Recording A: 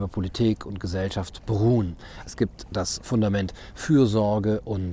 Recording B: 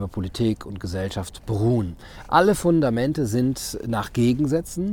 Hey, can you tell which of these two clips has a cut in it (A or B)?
A